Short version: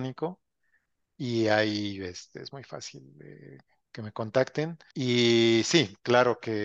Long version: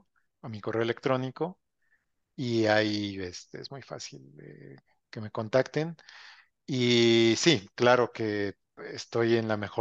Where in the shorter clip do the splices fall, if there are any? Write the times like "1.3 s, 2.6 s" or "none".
4.9 s